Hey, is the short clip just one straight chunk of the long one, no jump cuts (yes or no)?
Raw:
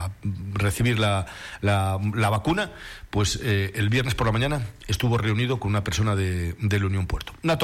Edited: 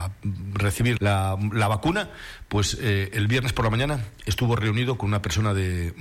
no